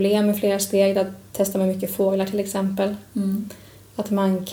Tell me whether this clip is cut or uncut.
uncut